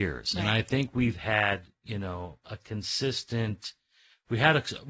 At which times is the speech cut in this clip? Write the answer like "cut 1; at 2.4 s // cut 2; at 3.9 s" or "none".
cut 1; at 2.4 s